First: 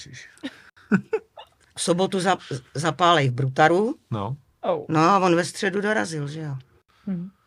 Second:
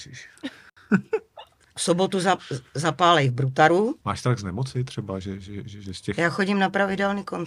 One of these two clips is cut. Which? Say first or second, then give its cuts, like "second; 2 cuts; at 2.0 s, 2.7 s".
second; 1 cut; at 4.0 s